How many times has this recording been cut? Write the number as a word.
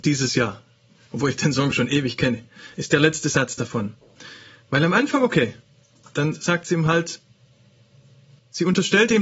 zero